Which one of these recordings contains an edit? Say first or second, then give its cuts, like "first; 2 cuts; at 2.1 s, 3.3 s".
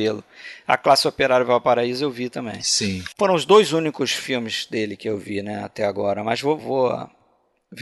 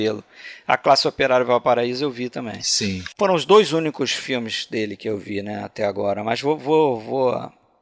first; 1 cut; at 6.6 s